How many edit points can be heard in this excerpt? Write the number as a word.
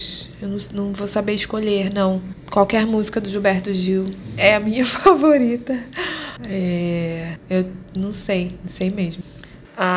zero